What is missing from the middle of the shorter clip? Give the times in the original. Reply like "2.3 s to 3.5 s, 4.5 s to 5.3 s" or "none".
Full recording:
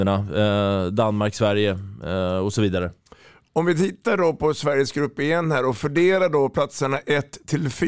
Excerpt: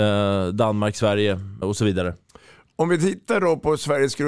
2.0 s to 2.4 s